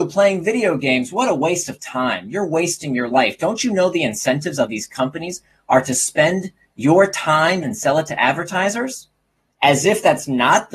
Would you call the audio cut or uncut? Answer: cut